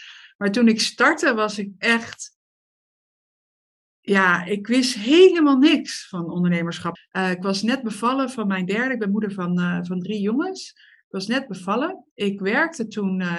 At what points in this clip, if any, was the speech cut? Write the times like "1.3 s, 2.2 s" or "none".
7.0 s